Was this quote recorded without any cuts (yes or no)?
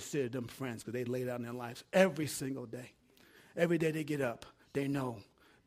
yes